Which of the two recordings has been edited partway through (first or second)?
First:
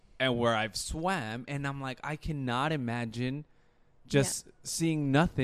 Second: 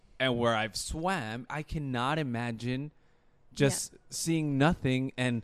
second